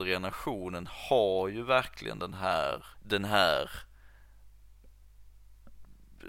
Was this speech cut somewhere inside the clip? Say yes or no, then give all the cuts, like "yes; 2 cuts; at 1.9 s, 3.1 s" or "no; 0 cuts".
yes; 1 cut; at 2.9 s